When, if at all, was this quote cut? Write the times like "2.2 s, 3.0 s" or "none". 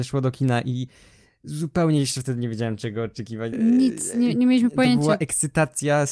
3.5 s